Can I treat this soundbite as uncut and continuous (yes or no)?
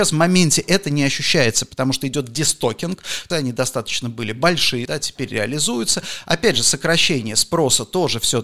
no